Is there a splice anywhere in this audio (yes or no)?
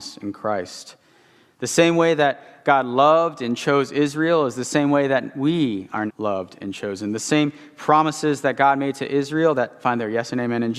yes